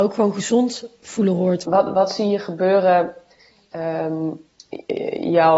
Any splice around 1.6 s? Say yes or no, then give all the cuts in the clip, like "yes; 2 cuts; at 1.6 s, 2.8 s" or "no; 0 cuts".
yes; 1 cut; at 1.6 s